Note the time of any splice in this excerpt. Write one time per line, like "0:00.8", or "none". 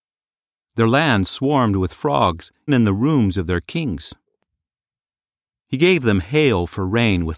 0:02.7
0:05.6